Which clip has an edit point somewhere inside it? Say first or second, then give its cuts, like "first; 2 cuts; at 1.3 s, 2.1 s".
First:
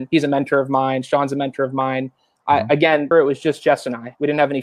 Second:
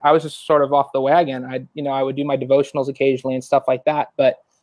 first; 1 cut; at 3.1 s